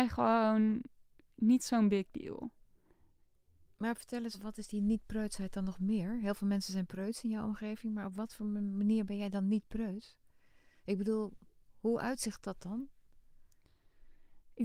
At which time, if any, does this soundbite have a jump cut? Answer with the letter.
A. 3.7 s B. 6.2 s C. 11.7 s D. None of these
D